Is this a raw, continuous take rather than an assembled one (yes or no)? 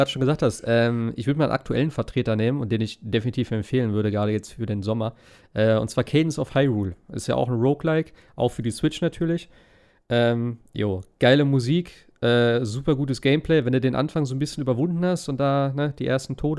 yes